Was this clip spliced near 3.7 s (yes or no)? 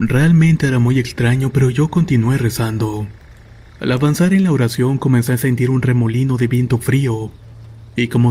no